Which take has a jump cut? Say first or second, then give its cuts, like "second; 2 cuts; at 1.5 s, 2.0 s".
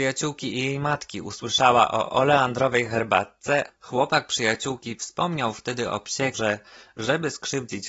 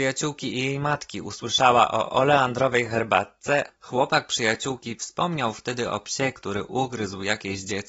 first; 1 cut; at 6.3 s